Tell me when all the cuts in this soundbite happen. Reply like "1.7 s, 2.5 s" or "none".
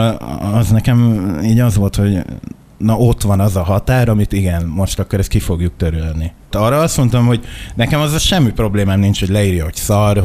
6.5 s

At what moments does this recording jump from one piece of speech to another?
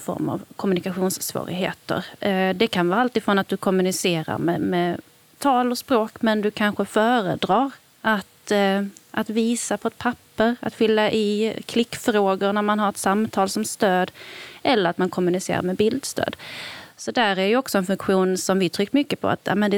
none

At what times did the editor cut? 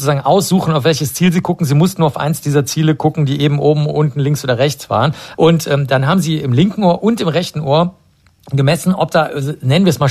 5.3 s

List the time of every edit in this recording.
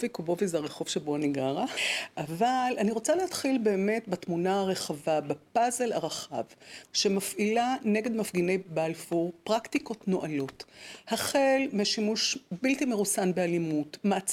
1.8 s, 6.8 s

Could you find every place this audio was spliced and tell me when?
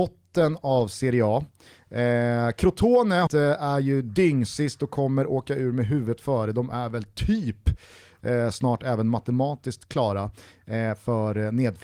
3.3 s

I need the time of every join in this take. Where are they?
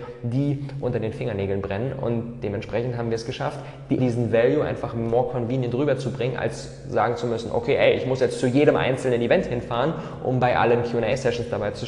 4.0 s

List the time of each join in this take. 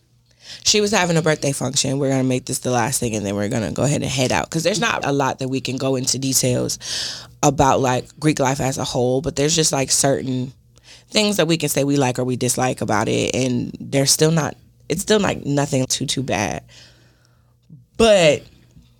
5.0 s, 15.8 s

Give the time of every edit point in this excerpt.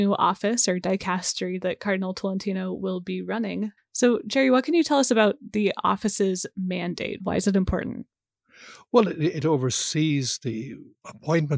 3.8 s, 7.2 s

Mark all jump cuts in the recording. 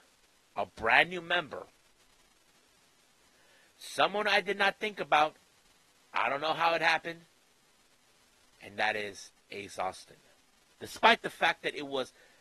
10.7 s

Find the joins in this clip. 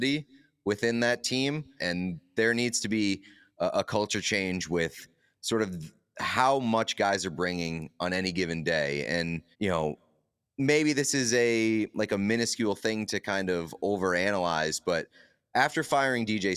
1.8 s, 9.5 s

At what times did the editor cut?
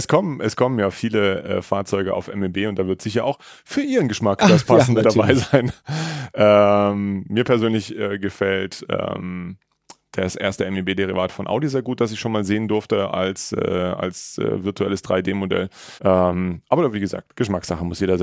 16.0 s

